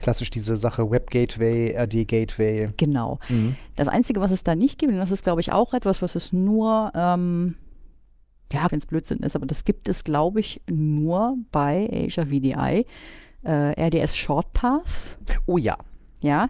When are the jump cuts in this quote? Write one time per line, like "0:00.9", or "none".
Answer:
0:08.7